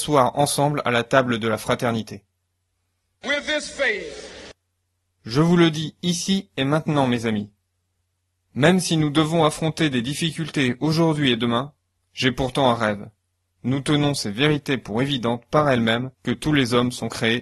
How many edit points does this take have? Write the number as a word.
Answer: three